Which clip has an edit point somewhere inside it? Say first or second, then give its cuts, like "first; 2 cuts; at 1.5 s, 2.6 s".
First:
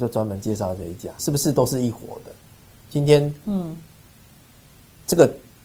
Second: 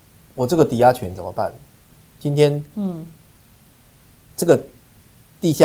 first; 2 cuts; at 1.2 s, 2.9 s